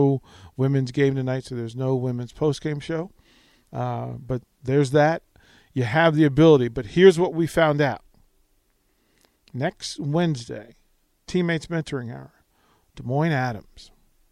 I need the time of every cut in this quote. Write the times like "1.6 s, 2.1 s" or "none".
none